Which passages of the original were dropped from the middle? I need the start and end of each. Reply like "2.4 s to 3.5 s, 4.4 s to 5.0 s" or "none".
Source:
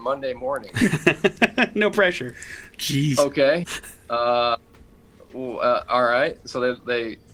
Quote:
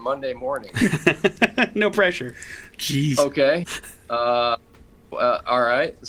5.1 s to 5.5 s